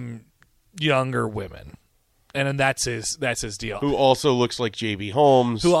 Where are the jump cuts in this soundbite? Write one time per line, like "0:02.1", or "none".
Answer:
0:03.8

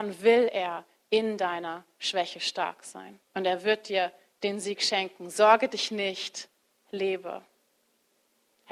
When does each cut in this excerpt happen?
0:03.3

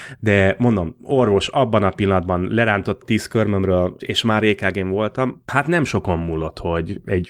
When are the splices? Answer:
0:04.0

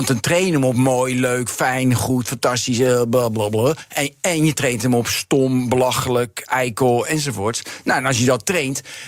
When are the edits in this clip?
none

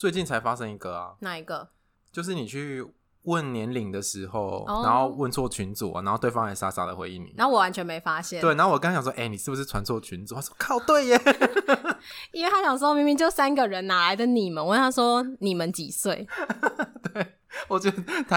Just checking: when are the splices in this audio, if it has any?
none

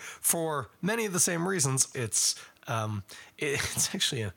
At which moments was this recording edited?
0:01.9

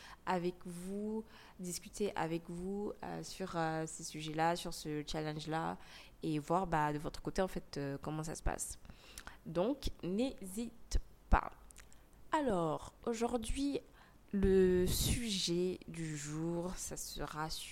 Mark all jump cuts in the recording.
none

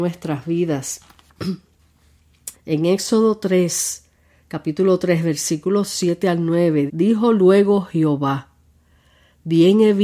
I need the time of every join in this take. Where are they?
0:02.5
0:06.9

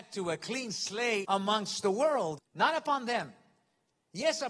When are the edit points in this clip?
0:01.2
0:02.4

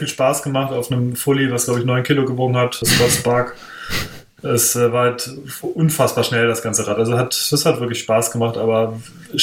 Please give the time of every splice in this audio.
0:02.8

